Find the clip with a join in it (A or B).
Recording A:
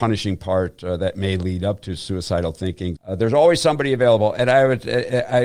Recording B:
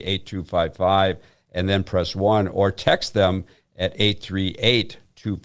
A